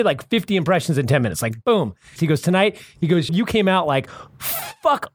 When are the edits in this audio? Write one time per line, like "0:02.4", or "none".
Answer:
0:02.2
0:03.3